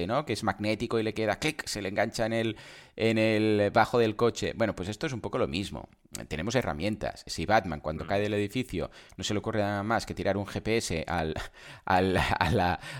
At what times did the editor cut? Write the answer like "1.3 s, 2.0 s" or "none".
7.3 s